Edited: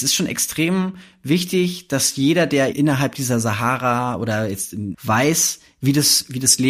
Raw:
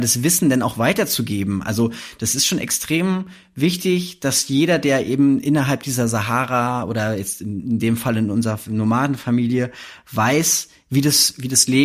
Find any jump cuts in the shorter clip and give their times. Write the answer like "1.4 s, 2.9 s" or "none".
2.7 s, 4.9 s